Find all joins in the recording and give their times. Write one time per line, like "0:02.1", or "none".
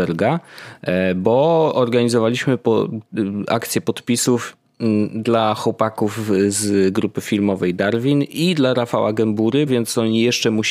0:09.7

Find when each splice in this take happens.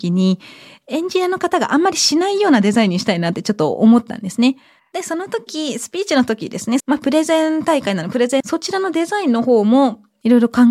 0:04.8
0:06.8
0:08.4

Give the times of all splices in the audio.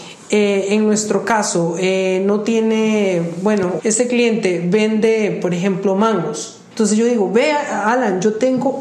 0:03.8
0:06.7

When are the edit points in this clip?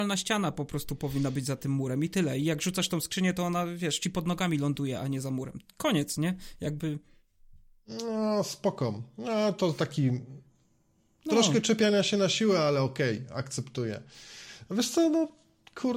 none

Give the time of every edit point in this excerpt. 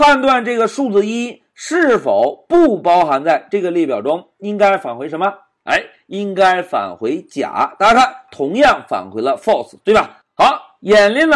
none

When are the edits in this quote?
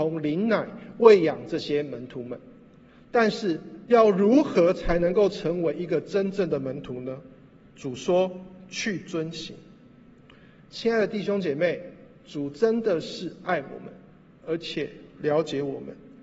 0:03.8

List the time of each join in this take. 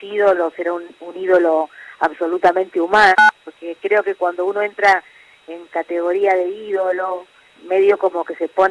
0:07.6

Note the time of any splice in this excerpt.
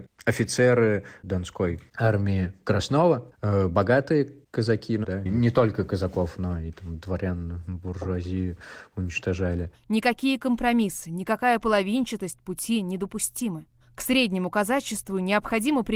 0:05.0
0:09.7
0:13.8

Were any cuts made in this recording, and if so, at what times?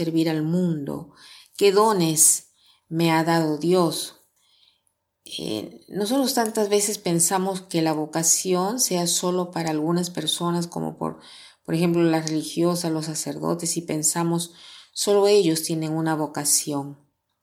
none

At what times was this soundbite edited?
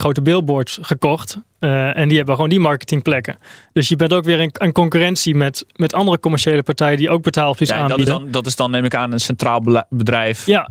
none

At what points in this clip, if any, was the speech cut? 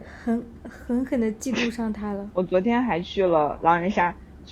0:02.3

